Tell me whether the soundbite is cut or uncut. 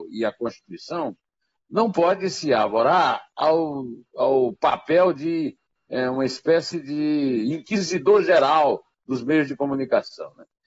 uncut